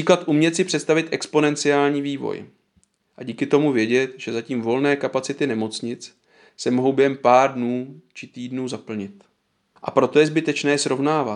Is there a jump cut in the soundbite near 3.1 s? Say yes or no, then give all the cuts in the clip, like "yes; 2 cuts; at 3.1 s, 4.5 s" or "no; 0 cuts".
no; 1 cut; at 9.8 s